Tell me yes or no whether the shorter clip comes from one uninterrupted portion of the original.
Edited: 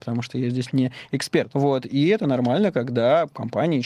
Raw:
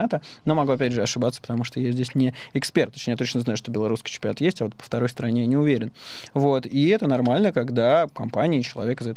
no